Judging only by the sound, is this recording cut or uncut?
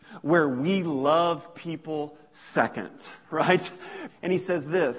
cut